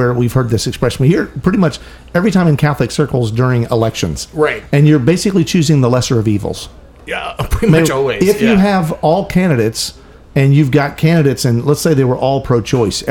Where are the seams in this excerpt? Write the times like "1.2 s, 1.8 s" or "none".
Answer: none

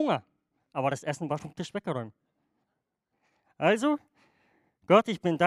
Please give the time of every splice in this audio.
1.4 s

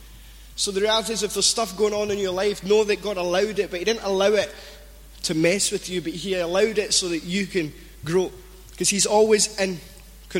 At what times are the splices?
none

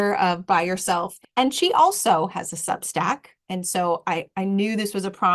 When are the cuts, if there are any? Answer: 1.2 s, 3.4 s

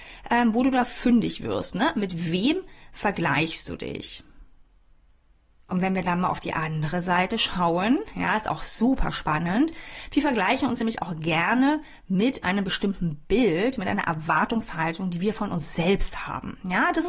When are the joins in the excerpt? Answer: none

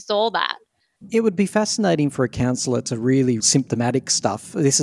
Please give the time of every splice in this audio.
3.4 s

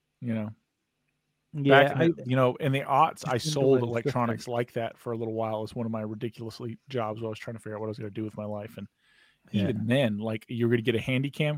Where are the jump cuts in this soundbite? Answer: none

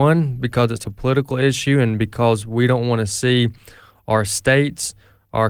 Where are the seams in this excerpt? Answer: none

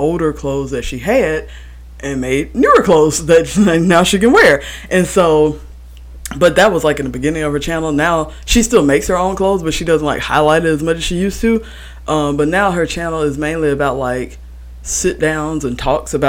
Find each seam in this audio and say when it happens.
none

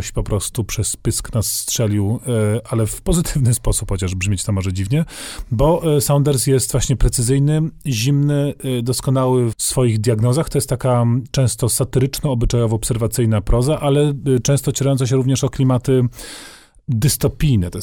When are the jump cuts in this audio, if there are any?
9.5 s

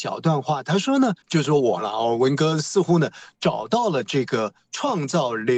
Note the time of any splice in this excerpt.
1.2 s

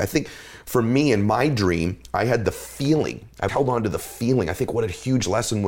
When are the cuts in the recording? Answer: 3.5 s

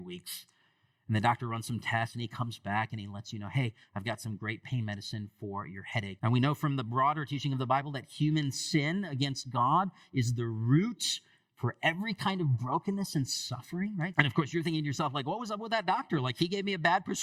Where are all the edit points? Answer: 6.2 s, 14.1 s

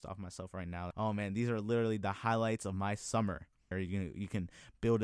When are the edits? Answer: 0.9 s, 3.7 s

